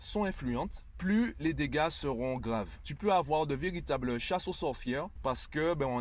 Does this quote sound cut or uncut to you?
uncut